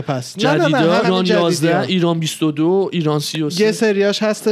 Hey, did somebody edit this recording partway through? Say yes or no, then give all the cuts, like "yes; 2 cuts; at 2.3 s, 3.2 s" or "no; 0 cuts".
yes; 1 cut; at 1.0 s